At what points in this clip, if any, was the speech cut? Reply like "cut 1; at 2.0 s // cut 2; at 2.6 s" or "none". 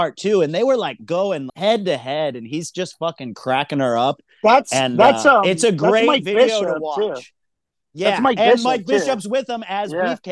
cut 1; at 1.5 s